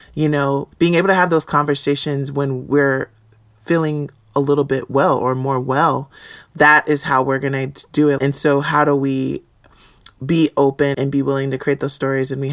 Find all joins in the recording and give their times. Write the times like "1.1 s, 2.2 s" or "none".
8.2 s, 10.9 s